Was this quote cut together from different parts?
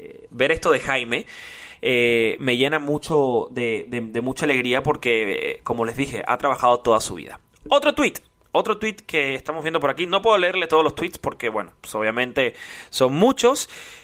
no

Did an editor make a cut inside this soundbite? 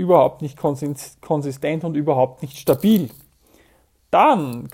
no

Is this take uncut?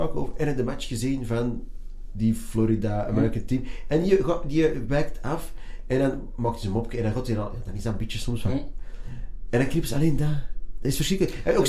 yes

